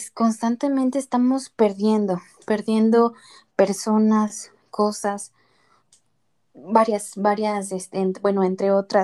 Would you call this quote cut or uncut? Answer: uncut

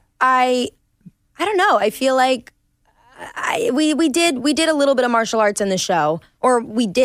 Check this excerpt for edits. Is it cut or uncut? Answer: uncut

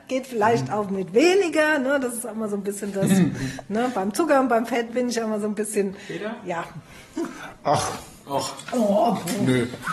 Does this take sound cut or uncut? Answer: cut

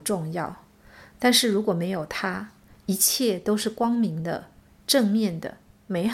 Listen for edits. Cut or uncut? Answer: uncut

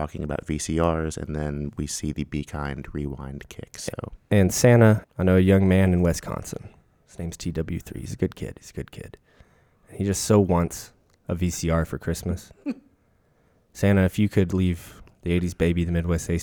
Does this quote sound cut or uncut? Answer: cut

